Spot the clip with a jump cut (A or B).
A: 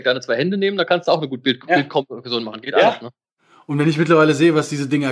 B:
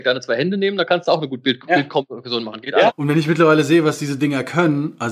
B